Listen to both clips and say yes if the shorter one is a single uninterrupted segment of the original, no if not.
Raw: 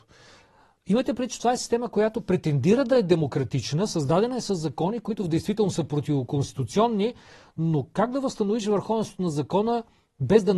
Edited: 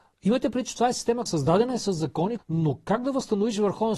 no